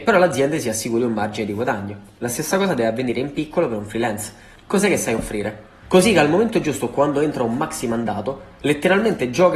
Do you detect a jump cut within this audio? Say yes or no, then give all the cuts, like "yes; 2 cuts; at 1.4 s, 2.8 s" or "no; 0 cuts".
yes; 2 cuts; at 4.6 s, 5.8 s